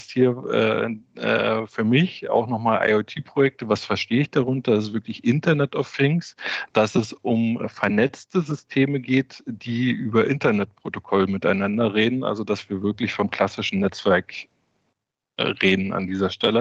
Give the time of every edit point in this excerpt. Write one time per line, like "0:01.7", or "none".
none